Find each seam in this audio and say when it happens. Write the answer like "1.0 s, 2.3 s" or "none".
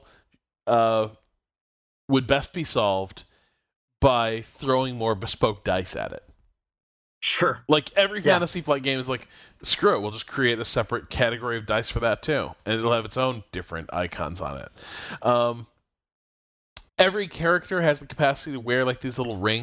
15.2 s, 16.9 s

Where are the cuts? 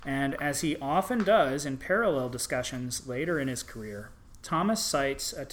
none

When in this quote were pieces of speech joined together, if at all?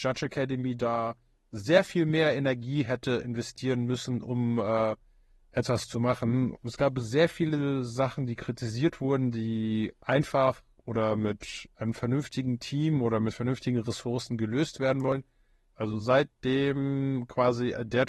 6.5 s, 15.7 s

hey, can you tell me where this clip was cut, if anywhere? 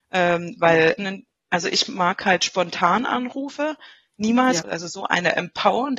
1.0 s, 4.6 s

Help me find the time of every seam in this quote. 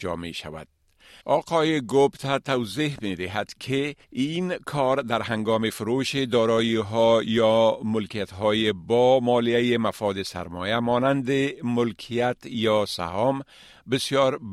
1.2 s, 4.0 s

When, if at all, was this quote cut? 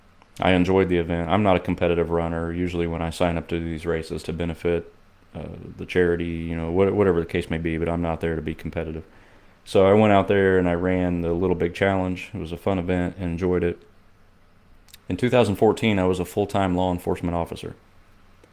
4.2 s, 15.0 s

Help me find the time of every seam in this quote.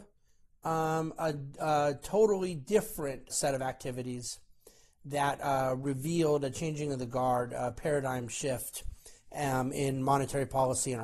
3.3 s

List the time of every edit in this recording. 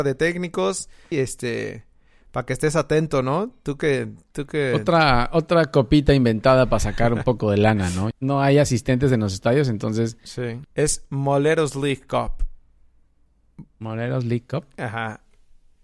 1.1 s, 8.1 s, 10.6 s

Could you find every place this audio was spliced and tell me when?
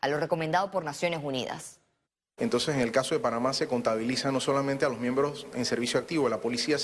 2.4 s

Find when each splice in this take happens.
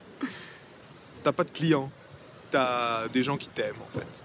none

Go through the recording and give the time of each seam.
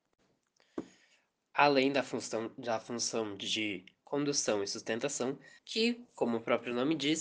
5.6 s

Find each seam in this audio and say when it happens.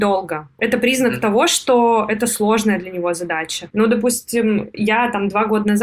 3.7 s

